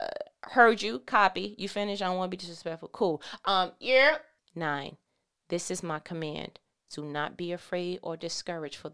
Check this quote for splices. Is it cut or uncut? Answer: cut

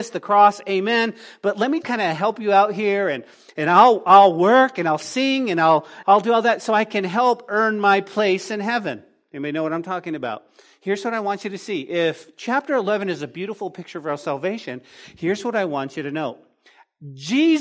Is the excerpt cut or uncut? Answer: cut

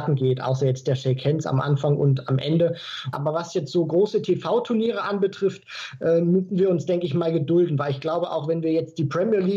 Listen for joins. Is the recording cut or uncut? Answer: cut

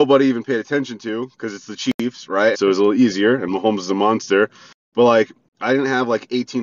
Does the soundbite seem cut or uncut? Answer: cut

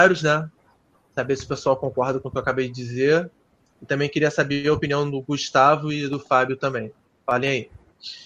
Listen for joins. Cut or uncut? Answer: uncut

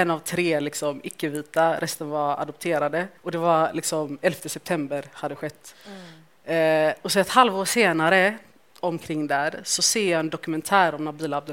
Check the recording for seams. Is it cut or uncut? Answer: cut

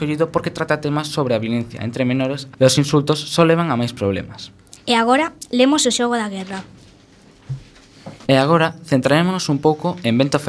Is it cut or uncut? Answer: cut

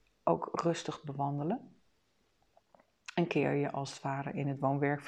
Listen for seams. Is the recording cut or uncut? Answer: uncut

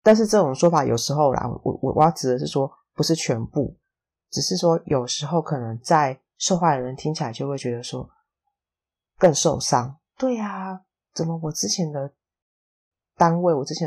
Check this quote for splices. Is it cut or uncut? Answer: uncut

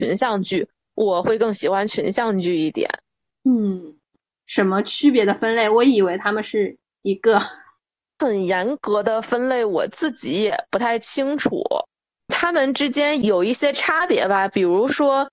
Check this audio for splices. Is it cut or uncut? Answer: cut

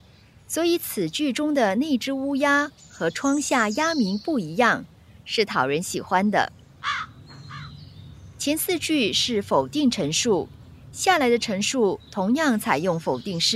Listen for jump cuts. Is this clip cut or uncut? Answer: uncut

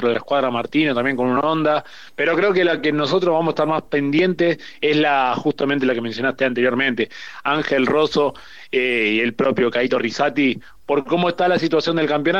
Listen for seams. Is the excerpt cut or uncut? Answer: uncut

